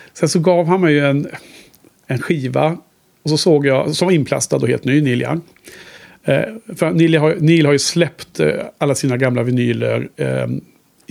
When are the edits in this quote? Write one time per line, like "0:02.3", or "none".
none